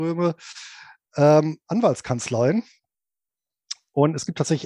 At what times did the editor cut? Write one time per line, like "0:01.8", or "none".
none